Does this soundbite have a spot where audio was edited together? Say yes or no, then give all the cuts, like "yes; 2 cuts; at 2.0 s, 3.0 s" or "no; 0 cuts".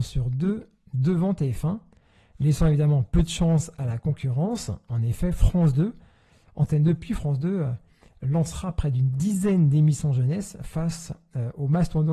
no; 0 cuts